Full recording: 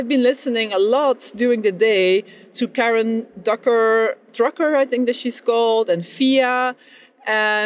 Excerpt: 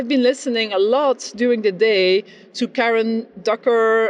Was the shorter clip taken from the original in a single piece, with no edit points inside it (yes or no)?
yes